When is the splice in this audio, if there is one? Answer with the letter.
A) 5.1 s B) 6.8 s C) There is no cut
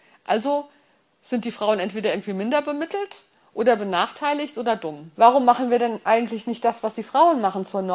A